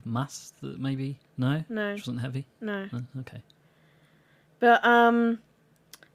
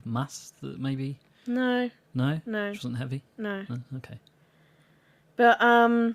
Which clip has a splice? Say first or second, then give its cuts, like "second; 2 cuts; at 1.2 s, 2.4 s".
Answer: first; 1 cut; at 1.3 s